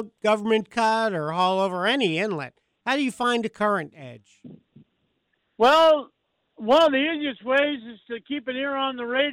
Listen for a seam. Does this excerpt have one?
no; 0 cuts

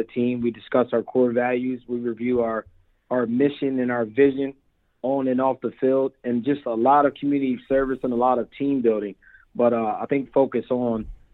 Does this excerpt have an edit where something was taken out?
yes; 1 cut; at 10.3 s

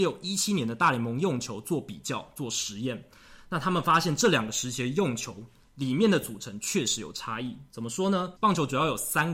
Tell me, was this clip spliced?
yes; 1 cut; at 8.4 s

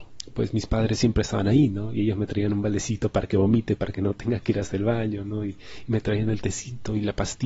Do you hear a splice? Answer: no; 0 cuts

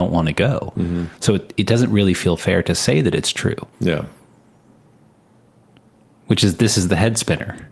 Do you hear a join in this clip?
yes; 1 cut; at 3.7 s

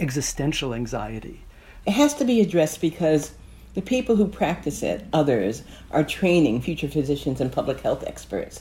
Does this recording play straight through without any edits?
no; 2 cuts; at 1.8 s, 5.1 s

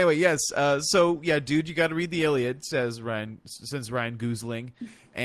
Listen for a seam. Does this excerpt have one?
no; 0 cuts

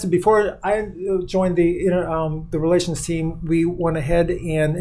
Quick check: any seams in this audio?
no; 0 cuts

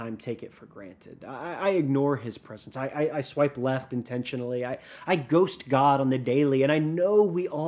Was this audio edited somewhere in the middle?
no; 0 cuts

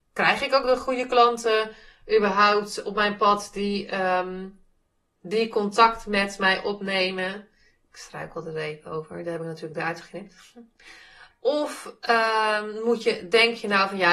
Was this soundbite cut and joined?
no; 0 cuts

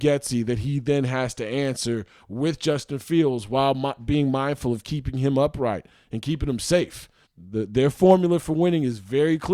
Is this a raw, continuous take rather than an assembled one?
no; 1 cut; at 7.3 s

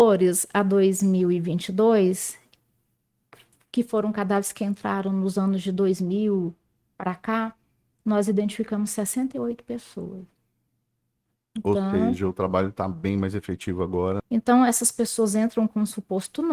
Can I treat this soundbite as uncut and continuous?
no; 1 cut; at 14.2 s

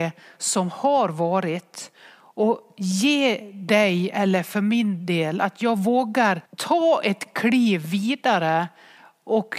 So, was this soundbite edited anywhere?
yes; 1 cut; at 6.5 s

